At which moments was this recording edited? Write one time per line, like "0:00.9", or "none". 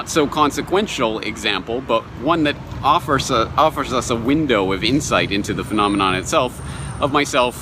none